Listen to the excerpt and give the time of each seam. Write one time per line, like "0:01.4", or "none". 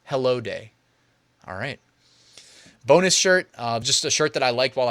none